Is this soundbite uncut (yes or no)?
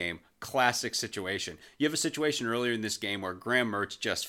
yes